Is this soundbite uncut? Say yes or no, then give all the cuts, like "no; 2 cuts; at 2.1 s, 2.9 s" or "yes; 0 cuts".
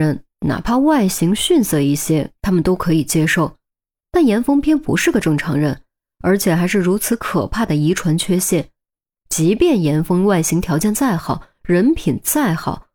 no; 1 cut; at 4.6 s